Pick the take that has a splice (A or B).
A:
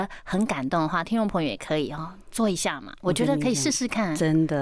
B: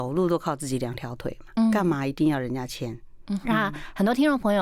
B